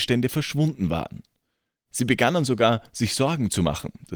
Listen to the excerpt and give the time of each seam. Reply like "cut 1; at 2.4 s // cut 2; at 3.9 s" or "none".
none